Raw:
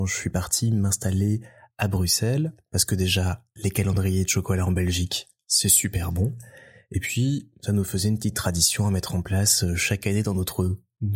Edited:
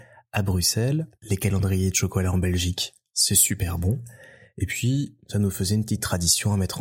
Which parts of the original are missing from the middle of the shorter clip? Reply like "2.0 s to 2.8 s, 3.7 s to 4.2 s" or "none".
2.6 s to 3.5 s

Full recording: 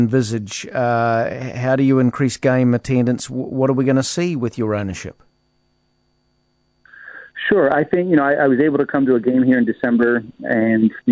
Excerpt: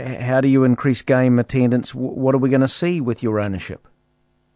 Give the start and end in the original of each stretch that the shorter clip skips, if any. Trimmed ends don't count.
none

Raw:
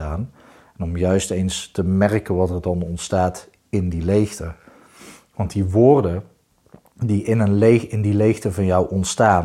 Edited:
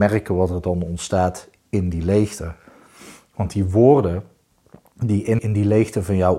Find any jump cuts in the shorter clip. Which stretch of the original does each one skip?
7.4 s to 7.9 s

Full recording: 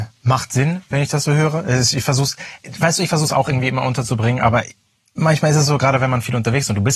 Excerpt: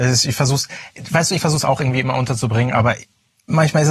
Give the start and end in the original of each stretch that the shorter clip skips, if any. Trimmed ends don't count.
none

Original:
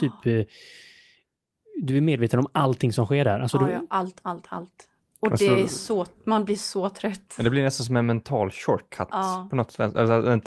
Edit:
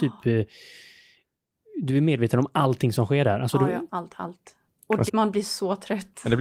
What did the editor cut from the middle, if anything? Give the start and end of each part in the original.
3.9 s to 4.2 s, 5.4 s to 6.2 s

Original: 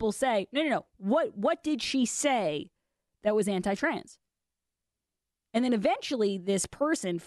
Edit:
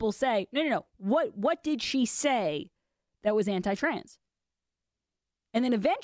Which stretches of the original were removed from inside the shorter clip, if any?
none

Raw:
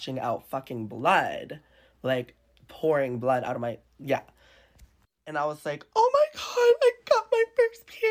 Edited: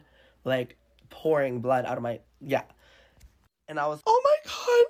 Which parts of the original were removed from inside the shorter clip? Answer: 5.6 s to 5.9 s

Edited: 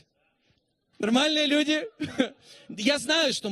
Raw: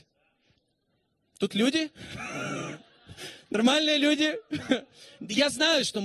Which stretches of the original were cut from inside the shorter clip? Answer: 0.9 s to 3.4 s

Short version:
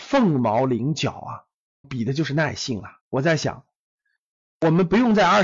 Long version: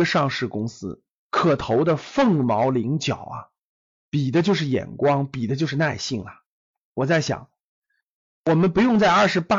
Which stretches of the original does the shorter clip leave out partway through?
3.9 s to 5.3 s, 6.4 s to 6.8 s

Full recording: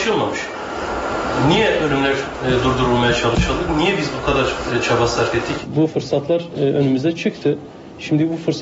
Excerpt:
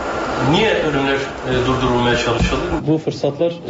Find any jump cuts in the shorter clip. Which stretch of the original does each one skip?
3.7 s to 5.7 s

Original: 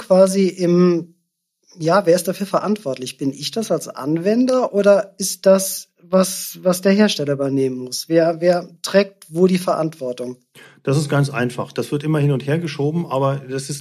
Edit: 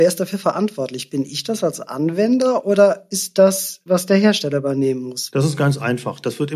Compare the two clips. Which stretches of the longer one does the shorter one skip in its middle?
5.9 s to 6.6 s, 8.1 s to 10.8 s

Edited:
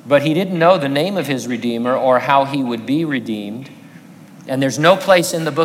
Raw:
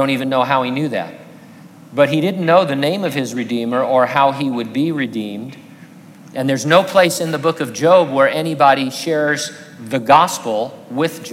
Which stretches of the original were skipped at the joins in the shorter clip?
none

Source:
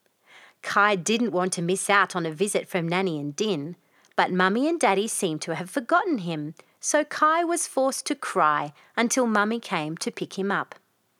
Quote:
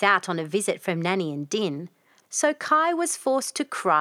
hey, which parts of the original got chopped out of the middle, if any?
4.1 s to 6.7 s

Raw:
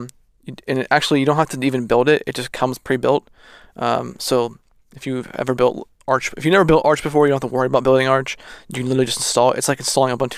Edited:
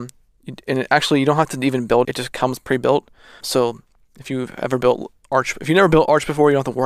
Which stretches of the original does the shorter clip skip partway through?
2.0 s to 2.2 s, 3.6 s to 4.2 s

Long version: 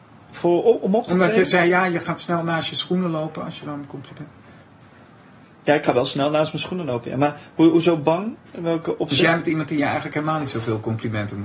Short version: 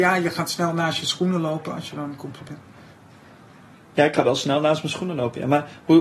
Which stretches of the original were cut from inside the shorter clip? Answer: none

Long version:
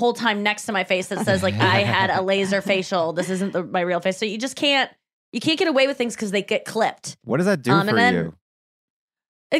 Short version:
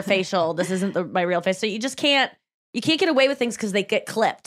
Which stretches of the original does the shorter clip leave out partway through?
none

